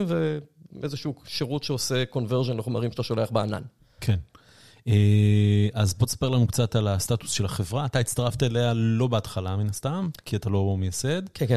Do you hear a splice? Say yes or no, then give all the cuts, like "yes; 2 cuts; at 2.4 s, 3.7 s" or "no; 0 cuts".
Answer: yes; 1 cut; at 4.0 s